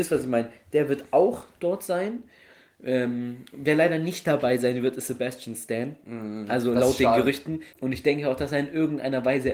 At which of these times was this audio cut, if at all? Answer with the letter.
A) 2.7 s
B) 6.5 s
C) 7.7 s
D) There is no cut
C